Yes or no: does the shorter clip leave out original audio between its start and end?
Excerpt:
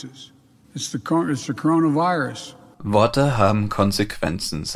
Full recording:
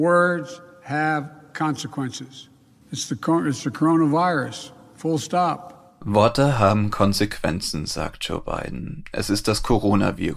yes